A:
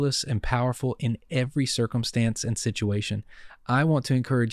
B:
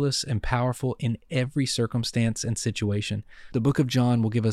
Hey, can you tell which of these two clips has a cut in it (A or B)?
A